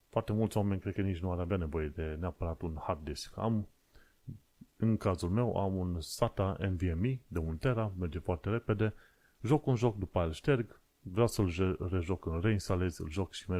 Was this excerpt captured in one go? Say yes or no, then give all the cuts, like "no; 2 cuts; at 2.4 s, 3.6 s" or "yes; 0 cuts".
yes; 0 cuts